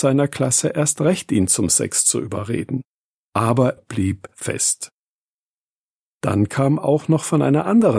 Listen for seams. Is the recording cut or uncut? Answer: cut